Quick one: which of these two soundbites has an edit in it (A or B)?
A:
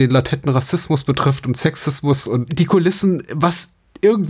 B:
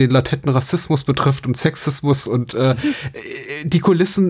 A